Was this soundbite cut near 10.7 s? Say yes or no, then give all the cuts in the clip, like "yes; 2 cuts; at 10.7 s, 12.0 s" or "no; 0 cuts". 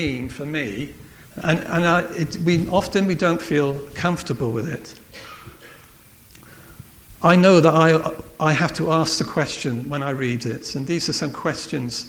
no; 1 cut; at 1.3 s